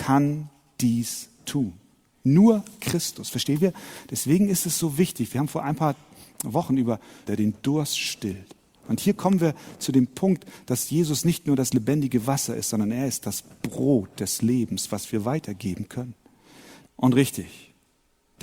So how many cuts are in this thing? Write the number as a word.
two